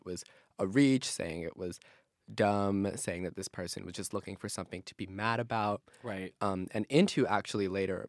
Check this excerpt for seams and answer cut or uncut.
uncut